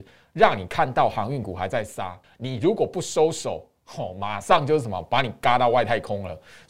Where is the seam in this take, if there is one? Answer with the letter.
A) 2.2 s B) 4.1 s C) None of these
A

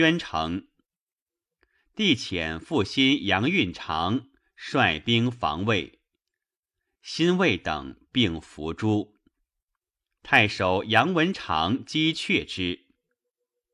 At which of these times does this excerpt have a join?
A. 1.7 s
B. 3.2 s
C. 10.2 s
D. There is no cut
C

